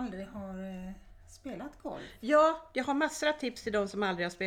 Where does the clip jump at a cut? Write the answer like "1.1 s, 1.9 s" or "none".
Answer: none